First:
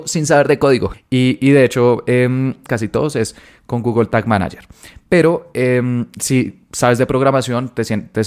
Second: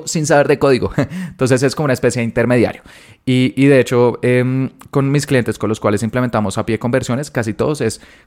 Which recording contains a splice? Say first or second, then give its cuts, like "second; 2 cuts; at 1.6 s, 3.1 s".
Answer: first; 2 cuts; at 0.9 s, 2.7 s